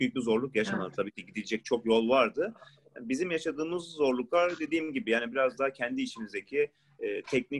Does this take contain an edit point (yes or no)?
no